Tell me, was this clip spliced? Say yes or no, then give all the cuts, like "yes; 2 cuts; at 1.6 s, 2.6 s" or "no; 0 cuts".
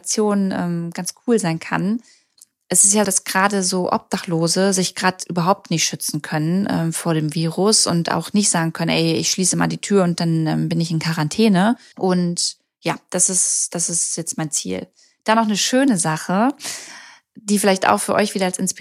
yes; 2 cuts; at 3.0 s, 11.9 s